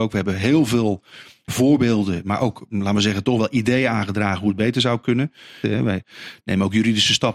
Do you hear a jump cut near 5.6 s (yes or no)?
yes